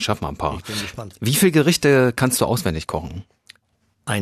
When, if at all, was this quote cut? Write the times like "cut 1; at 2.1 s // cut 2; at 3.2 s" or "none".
none